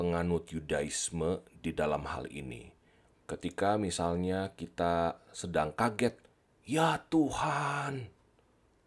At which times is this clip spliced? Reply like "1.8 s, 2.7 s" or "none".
3.1 s